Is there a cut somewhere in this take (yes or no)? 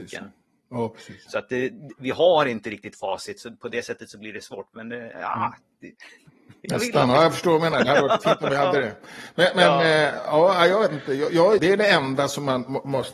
yes